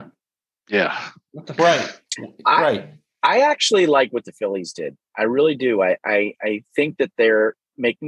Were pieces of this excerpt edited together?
no; 0 cuts

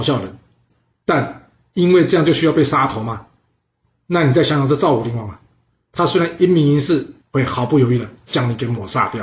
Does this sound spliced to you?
yes; 1 cut; at 7.2 s

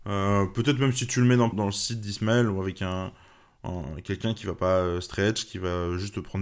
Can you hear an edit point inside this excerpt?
yes; 1 cut; at 1.5 s

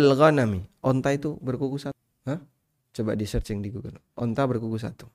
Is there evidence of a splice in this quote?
no; 0 cuts

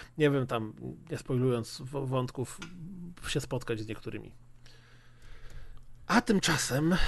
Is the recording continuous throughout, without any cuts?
yes; 0 cuts

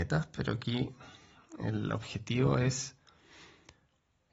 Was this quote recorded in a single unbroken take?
yes; 0 cuts

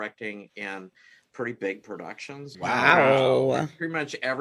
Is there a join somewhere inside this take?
yes; 1 cut; at 2.5 s

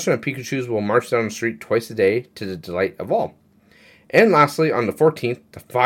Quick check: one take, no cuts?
yes; 0 cuts

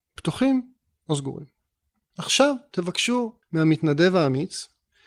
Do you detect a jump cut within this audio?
yes; 2 cuts; at 2.1 s, 3.4 s

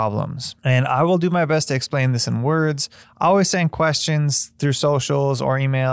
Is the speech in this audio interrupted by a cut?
yes; 1 cut; at 3.0 s

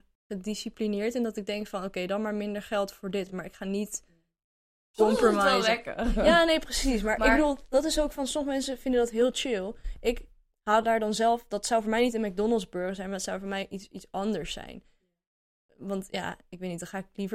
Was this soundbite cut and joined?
no; 0 cuts

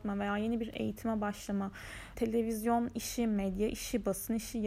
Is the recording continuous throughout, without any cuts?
no; 1 cut; at 2.2 s

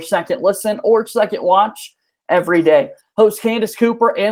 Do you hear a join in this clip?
no; 0 cuts

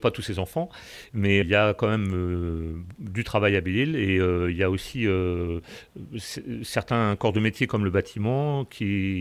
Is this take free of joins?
no; 1 cut; at 1.4 s

